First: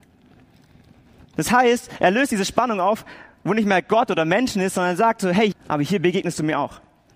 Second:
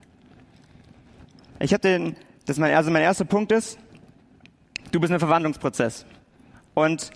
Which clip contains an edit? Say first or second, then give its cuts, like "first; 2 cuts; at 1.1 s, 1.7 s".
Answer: first; 2 cuts; at 1.3 s, 5.5 s